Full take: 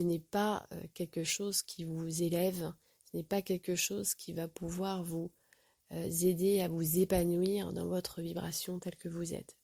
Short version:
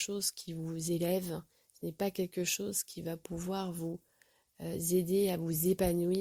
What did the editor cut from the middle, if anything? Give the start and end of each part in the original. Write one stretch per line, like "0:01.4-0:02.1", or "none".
none